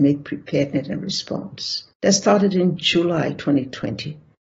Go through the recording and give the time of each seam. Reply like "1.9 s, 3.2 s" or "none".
1.9 s